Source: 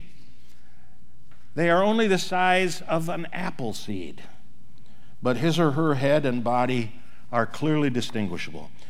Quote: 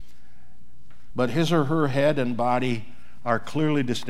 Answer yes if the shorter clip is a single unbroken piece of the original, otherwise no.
no